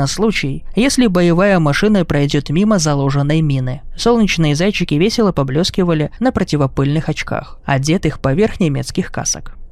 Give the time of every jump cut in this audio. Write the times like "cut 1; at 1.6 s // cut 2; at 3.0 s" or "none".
none